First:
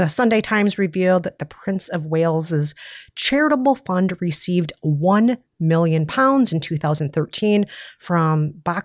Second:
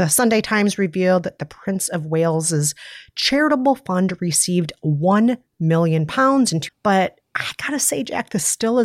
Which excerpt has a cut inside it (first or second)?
second